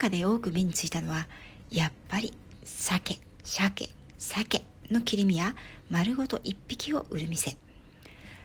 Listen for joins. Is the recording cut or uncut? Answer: uncut